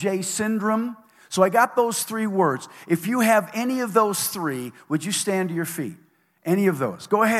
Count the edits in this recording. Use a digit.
0